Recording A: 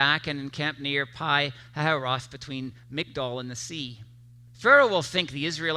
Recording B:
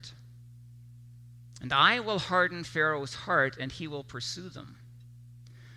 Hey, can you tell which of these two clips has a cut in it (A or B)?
A